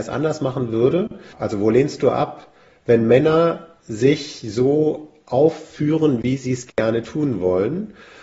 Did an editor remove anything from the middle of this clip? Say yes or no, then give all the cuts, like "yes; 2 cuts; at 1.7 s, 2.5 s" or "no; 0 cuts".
yes; 1 cut; at 1.3 s